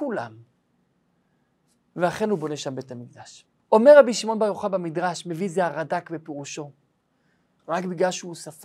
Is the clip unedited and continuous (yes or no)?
no